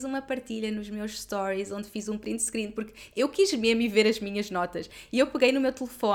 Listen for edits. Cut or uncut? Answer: uncut